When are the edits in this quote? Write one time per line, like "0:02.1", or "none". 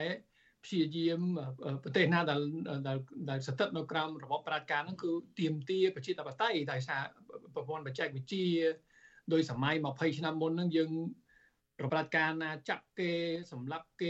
0:11.9